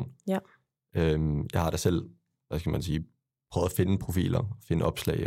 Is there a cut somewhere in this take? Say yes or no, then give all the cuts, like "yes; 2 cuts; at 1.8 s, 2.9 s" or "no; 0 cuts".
no; 0 cuts